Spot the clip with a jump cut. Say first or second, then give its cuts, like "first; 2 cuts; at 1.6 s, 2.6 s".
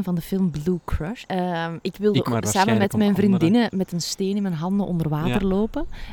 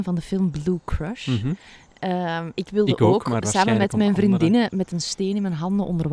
first; 2 cuts; at 1.2 s, 2.2 s